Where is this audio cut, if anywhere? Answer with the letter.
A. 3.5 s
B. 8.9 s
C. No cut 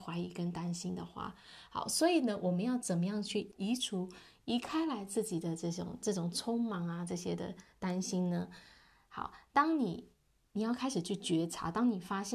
A